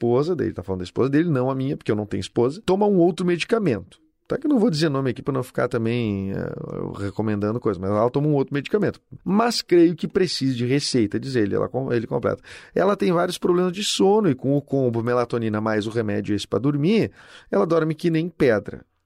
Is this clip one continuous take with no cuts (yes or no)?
yes